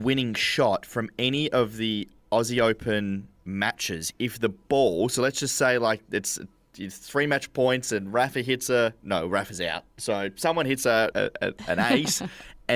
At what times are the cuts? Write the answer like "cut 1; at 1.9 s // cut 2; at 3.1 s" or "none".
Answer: cut 1; at 11.1 s